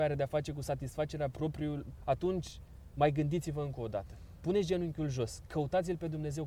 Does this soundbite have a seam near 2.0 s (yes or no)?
yes